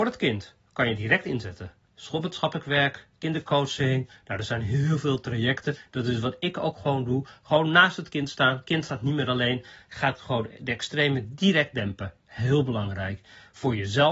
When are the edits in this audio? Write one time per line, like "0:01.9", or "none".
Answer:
none